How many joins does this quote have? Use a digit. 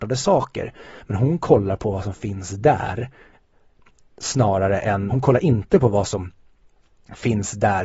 1